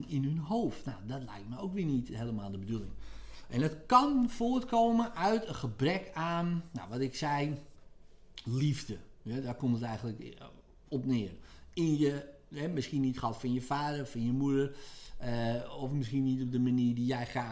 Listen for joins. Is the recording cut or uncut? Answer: uncut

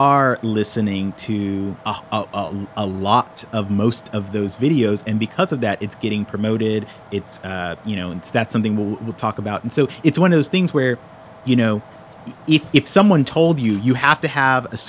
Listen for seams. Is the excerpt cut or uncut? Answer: cut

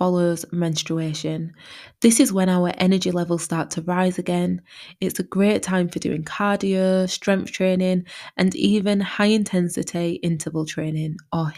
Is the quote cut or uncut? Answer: uncut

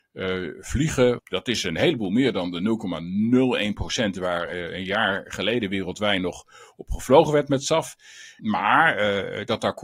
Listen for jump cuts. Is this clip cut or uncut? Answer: cut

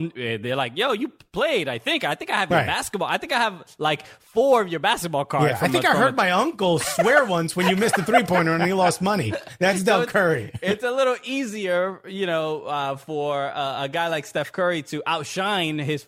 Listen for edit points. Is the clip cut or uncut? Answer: uncut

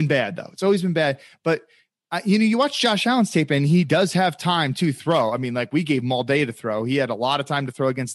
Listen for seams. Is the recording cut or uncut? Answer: uncut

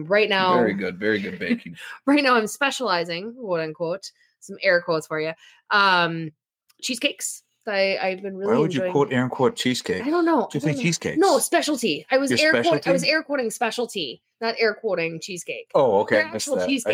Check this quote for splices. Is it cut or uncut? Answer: uncut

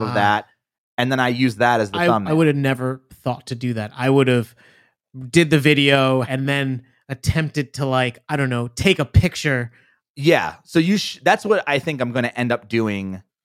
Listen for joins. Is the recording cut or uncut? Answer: cut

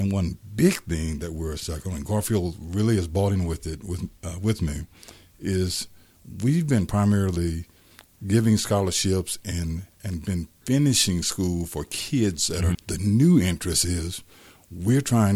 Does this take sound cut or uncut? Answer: cut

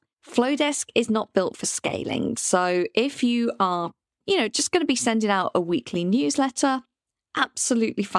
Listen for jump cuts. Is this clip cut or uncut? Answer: uncut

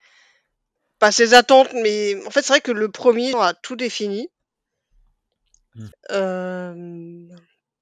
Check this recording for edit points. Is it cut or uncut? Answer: cut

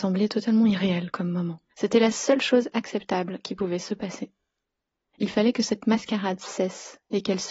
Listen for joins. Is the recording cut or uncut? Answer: cut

